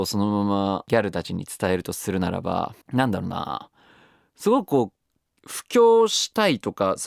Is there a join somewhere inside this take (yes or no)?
yes